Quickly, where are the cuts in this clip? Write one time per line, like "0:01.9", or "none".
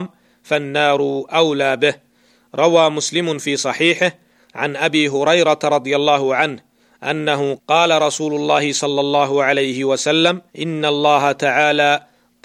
0:07.6
0:10.5